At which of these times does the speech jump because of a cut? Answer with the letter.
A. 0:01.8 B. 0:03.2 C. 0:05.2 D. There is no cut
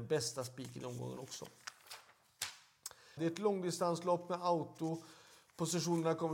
B